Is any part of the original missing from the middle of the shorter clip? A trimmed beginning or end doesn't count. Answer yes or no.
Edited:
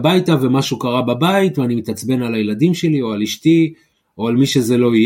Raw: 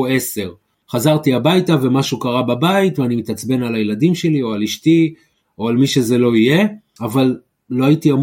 no